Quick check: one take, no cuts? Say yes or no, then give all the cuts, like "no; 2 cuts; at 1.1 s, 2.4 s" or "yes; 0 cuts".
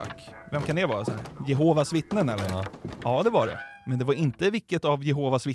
yes; 0 cuts